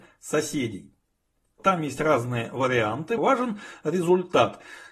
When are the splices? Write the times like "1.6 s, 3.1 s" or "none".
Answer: 1.6 s, 3.2 s